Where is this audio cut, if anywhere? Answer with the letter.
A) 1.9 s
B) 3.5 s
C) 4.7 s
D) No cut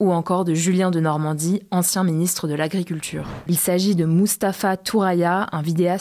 B